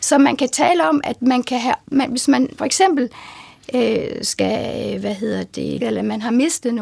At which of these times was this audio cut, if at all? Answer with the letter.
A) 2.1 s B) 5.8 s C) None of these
B